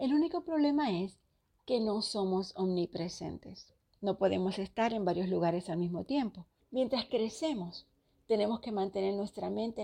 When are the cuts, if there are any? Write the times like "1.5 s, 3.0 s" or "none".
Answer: 6.6 s